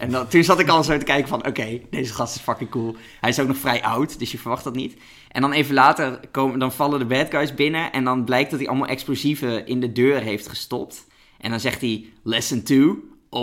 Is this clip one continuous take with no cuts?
yes; 0 cuts

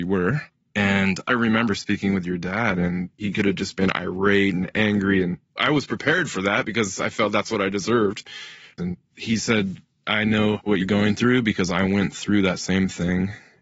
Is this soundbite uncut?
no; 1 cut; at 8.8 s

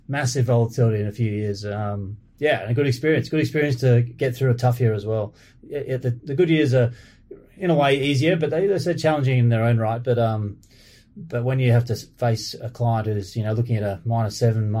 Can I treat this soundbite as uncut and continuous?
yes; 0 cuts

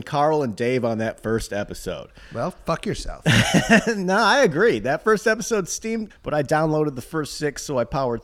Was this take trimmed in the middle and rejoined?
yes; 1 cut; at 6.1 s

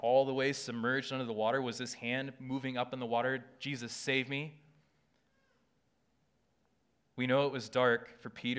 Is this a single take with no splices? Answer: yes; 0 cuts

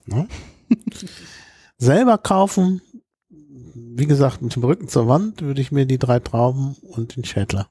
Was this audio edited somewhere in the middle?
no; 0 cuts

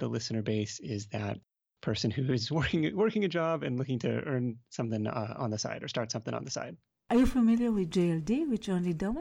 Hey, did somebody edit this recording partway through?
no; 0 cuts

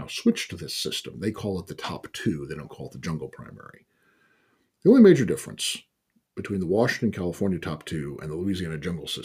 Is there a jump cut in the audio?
yes; 1 cut; at 4.8 s

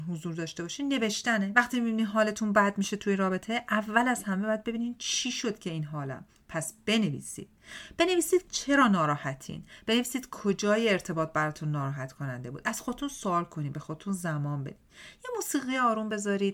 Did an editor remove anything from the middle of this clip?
no; 0 cuts

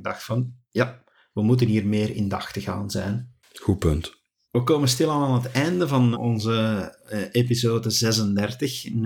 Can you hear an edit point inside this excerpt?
yes; 2 cuts; at 4.4 s, 6.1 s

